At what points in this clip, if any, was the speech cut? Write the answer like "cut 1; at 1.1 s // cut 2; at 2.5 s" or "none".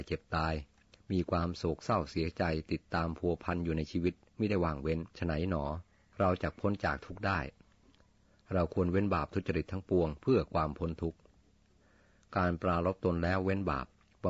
cut 1; at 5.1 s